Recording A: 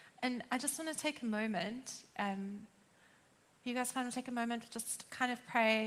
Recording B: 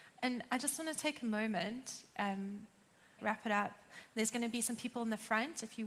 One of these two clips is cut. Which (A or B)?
B